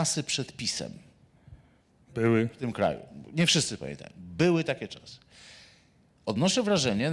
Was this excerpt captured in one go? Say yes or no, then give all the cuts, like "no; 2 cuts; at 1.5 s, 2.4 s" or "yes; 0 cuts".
yes; 0 cuts